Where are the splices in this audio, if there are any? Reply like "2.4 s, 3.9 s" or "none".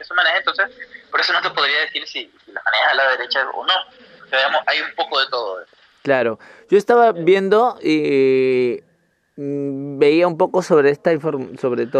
none